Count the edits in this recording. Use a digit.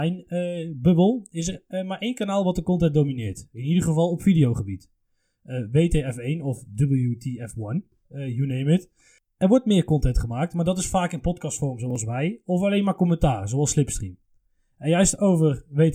0